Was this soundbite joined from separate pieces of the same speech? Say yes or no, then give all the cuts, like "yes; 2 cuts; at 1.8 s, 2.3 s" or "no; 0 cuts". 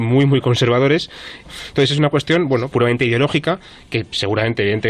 yes; 2 cuts; at 1.4 s, 2.7 s